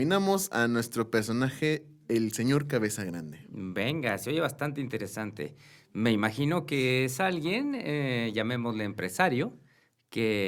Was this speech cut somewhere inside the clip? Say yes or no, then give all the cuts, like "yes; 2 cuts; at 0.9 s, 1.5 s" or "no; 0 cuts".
no; 0 cuts